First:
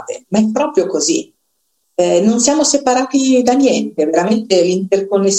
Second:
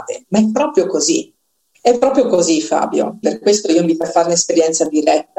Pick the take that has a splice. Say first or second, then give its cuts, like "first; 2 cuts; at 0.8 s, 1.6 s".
second; 2 cuts; at 1.7 s, 3.2 s